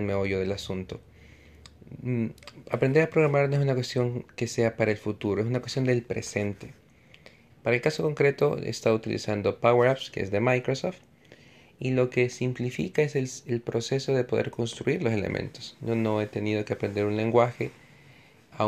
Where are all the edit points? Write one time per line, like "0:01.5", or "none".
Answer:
0:07.5

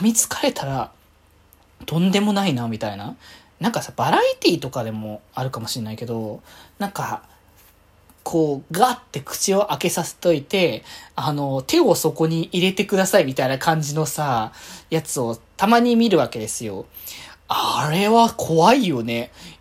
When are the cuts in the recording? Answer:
none

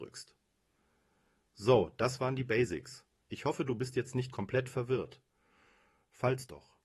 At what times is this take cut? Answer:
none

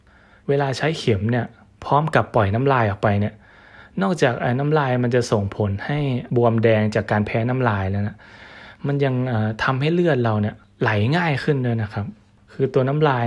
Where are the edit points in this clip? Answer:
none

